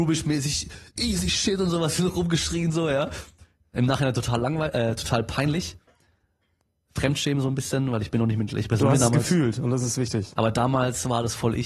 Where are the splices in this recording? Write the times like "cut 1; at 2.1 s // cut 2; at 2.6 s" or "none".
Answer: none